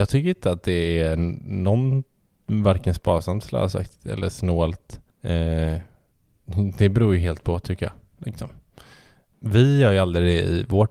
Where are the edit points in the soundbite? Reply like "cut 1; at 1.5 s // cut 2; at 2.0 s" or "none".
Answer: cut 1; at 5.1 s // cut 2; at 8.2 s